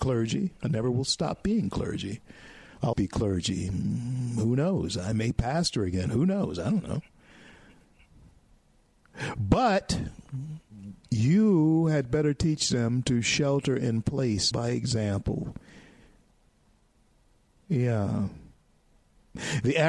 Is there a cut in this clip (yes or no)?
yes